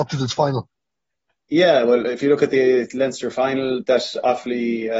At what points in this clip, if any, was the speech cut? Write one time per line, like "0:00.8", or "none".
none